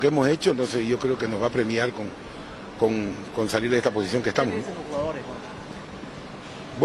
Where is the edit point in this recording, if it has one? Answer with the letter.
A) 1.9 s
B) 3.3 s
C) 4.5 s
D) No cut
D